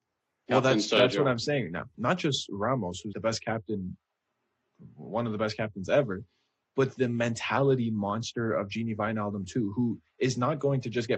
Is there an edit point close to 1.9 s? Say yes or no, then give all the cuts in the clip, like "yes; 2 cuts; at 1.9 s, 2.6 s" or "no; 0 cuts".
yes; 2 cuts; at 1.9 s, 3.1 s